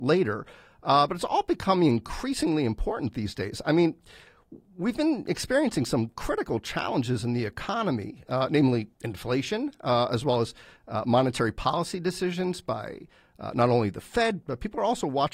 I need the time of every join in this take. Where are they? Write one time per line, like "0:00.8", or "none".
0:08.9
0:14.4